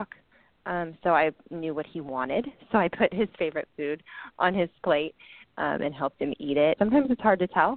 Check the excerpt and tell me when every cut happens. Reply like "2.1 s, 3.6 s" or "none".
6.8 s